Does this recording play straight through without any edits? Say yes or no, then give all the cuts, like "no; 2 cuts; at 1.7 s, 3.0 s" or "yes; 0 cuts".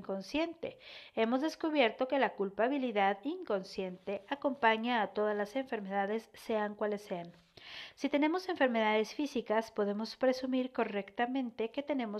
yes; 0 cuts